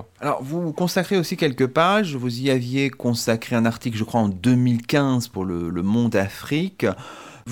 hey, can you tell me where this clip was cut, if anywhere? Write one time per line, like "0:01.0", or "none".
none